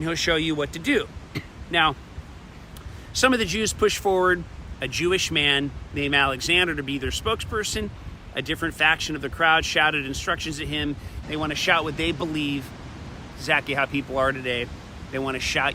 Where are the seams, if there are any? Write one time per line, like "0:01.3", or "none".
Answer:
0:11.2
0:13.3